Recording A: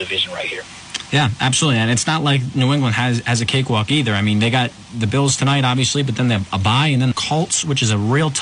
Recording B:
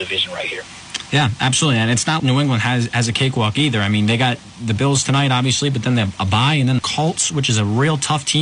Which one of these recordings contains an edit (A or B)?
B